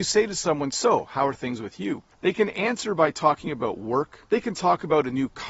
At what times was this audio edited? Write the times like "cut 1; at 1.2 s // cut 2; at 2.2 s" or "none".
cut 1; at 2.1 s // cut 2; at 4.2 s